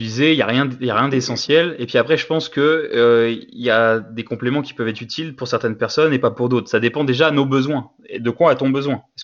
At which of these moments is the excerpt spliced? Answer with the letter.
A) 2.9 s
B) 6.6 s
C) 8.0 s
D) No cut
D